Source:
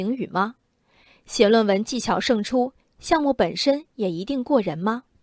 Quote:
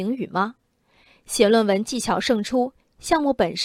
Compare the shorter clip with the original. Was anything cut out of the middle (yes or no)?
no